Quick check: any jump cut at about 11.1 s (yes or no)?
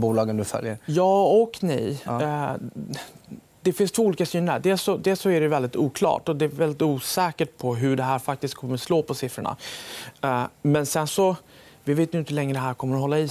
yes